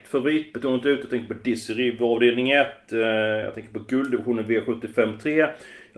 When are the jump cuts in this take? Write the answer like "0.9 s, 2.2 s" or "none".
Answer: none